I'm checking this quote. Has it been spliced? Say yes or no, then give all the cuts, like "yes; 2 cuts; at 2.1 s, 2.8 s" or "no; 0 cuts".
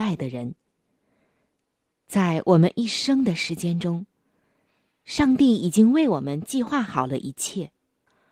no; 0 cuts